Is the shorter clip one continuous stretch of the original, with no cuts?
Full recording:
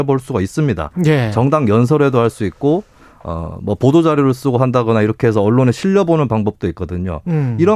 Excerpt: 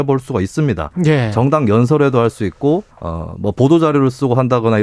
no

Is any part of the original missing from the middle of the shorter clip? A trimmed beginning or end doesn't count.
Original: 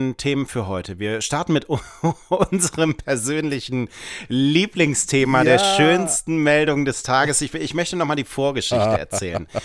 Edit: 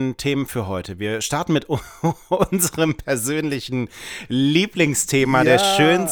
no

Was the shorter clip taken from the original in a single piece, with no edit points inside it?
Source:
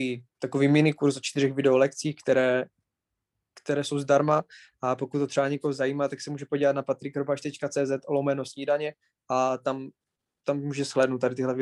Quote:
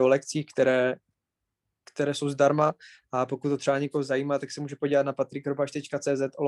yes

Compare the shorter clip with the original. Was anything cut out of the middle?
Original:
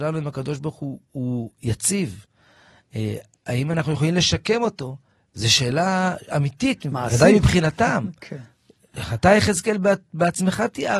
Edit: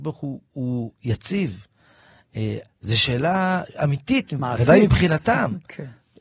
yes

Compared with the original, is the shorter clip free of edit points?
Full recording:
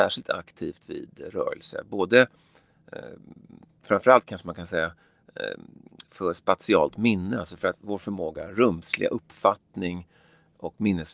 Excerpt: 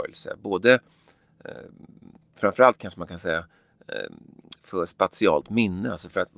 yes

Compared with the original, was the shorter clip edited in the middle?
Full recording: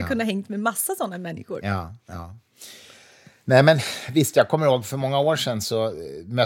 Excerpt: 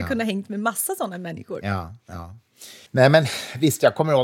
yes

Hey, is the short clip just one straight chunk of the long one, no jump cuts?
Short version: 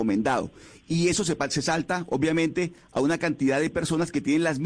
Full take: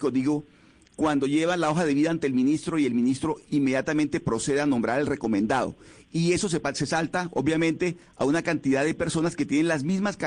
yes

